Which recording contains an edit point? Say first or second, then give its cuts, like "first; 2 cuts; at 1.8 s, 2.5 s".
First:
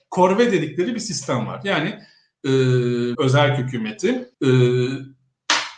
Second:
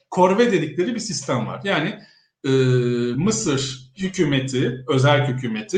first; 2 cuts; at 3.1 s, 4.3 s